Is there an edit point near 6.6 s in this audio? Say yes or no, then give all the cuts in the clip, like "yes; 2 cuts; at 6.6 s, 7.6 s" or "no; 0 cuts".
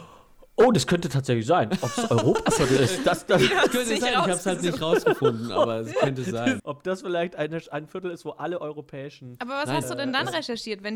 yes; 1 cut; at 6.6 s